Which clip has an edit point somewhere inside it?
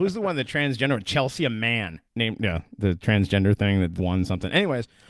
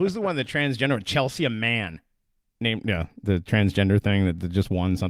first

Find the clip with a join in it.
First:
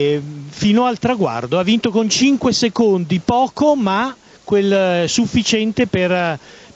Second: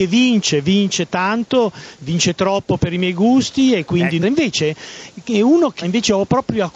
second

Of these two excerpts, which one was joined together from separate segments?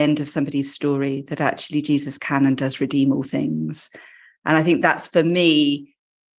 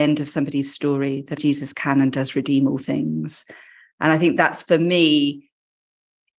second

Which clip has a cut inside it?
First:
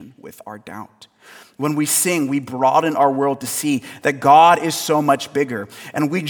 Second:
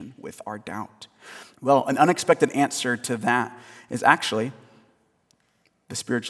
second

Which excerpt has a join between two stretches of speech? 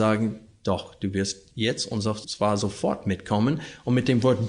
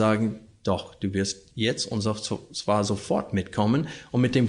first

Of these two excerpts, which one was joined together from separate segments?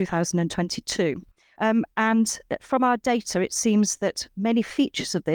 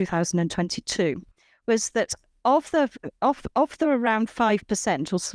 first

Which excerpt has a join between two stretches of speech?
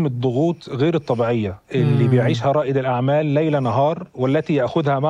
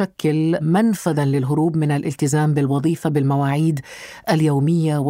first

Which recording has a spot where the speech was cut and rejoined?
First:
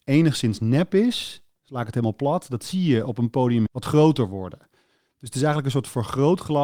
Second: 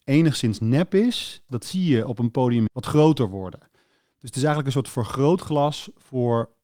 second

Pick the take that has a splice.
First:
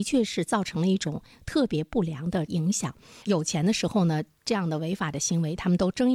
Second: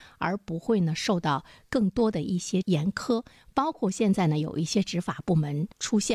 first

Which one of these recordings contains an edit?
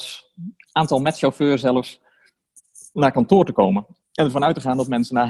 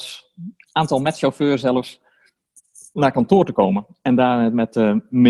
first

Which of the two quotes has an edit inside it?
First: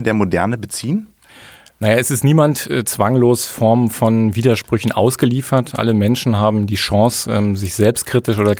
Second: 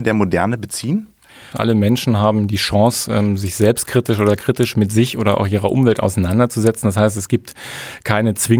second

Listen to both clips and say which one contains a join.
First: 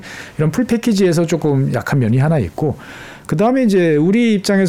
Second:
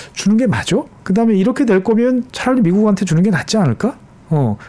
second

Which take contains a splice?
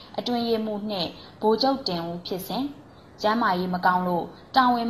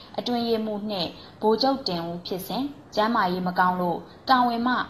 second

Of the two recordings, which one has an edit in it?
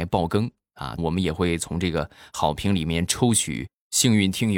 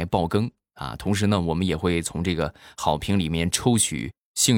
first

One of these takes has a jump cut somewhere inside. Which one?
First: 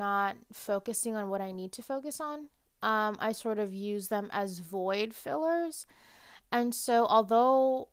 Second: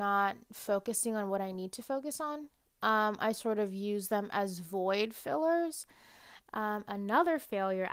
second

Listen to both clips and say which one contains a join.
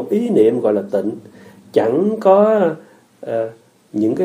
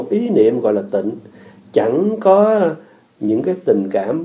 second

